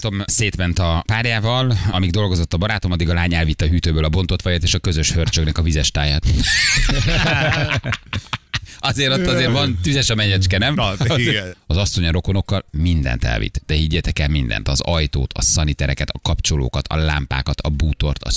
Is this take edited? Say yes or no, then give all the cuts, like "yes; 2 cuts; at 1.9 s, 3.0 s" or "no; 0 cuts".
yes; 1 cut; at 9.5 s